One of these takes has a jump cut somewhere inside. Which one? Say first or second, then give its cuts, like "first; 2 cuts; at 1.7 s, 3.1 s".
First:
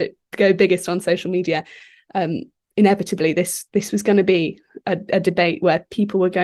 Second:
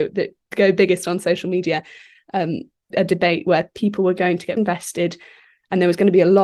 second; 2 cuts; at 2.9 s, 4.6 s